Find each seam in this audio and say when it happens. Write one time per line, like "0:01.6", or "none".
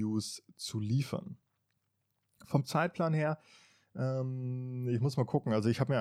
none

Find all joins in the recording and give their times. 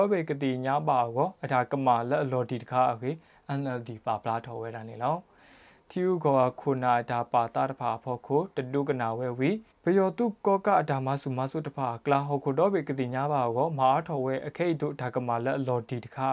0:09.7

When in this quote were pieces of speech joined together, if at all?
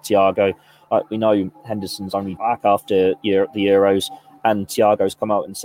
0:02.4

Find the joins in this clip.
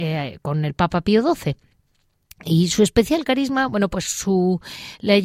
none

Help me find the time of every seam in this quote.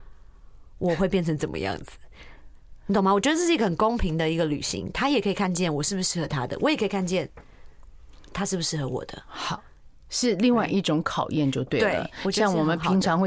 none

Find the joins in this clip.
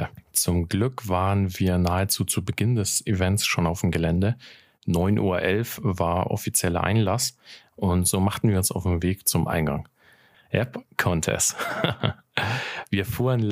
0:10.3

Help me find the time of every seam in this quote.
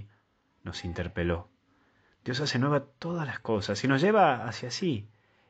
none

